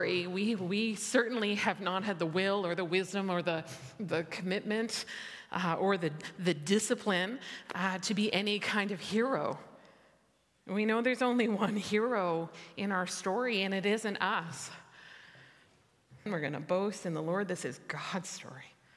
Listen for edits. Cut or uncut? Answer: cut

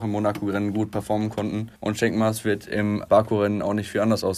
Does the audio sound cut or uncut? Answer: cut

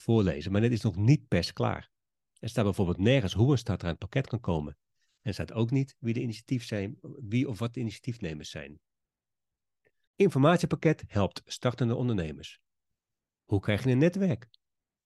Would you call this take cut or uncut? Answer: cut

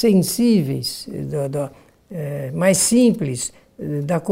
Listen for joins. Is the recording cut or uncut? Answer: uncut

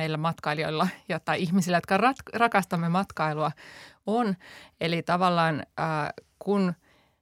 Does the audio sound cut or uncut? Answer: uncut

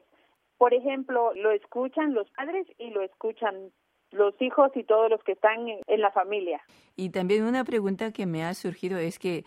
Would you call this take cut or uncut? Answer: cut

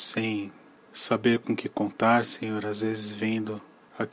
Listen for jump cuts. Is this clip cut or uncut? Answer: uncut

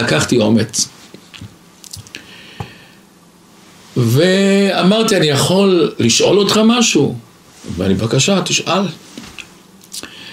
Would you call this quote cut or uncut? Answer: uncut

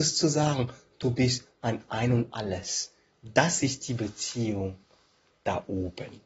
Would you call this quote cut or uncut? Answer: uncut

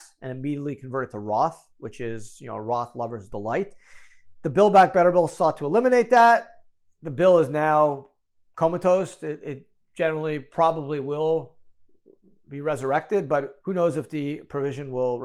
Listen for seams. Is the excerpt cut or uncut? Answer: cut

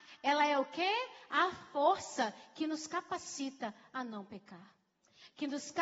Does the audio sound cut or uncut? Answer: uncut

